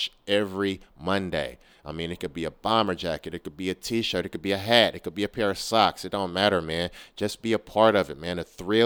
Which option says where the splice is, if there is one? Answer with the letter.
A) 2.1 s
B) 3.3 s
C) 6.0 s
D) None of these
D